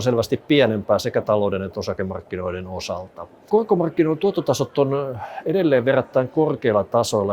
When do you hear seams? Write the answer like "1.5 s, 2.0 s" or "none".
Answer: 3.5 s